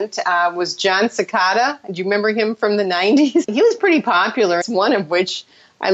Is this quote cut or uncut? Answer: cut